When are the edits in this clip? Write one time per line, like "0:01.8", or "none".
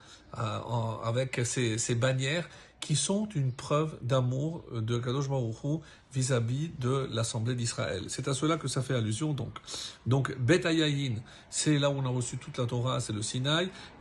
none